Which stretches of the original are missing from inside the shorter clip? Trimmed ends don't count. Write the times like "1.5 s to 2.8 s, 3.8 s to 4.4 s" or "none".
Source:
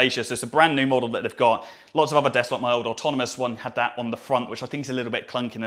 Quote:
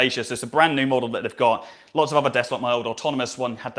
none